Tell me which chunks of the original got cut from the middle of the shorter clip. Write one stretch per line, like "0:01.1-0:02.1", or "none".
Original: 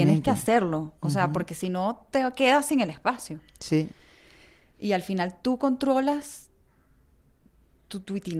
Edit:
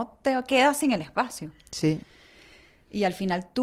none